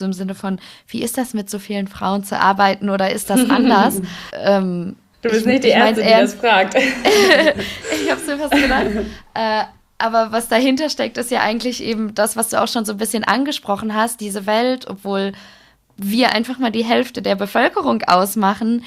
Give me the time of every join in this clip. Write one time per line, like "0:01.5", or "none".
0:04.3